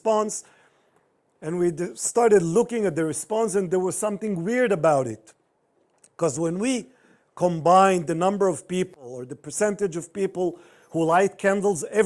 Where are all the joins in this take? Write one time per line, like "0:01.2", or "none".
none